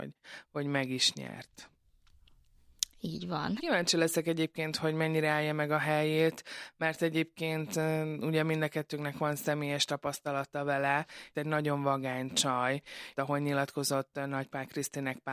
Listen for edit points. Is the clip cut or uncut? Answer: cut